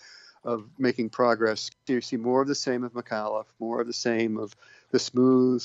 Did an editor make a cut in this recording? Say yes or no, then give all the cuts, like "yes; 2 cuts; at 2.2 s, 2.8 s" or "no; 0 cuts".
no; 0 cuts